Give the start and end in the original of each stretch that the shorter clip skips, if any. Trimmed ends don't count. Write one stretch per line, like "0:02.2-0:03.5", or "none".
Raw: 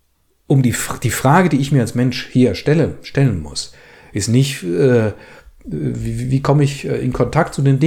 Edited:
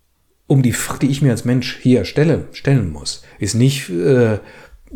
0:01.0-0:01.5
0:03.8-0:04.1